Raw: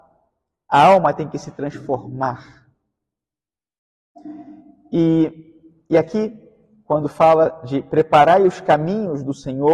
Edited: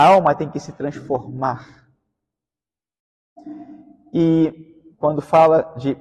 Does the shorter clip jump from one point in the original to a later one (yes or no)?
yes